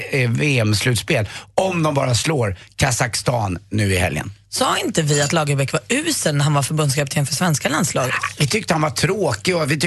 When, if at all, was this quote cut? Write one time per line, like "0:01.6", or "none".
none